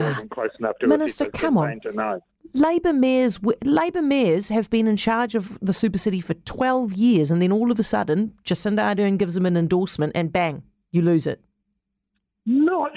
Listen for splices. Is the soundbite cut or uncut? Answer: uncut